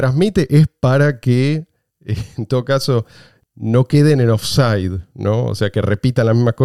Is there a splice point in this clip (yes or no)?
no